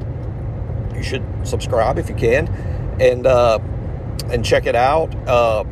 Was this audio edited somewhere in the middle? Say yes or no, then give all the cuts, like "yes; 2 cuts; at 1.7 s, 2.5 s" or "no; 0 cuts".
no; 0 cuts